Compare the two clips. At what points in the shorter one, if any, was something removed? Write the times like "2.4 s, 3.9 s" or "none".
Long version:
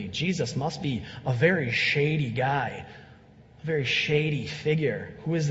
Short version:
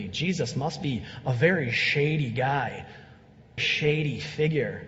3.6 s